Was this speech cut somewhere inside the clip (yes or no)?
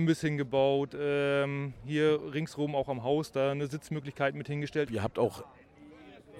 yes